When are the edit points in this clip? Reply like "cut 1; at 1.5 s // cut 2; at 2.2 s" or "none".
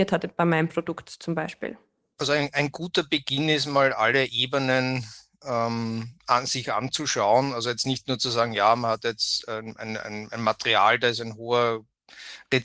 none